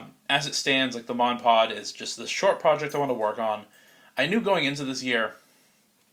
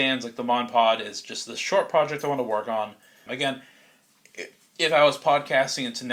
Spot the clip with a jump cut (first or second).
second